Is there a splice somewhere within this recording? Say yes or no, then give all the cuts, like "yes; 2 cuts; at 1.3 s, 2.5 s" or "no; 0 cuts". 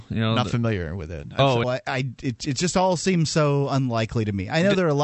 yes; 1 cut; at 1.6 s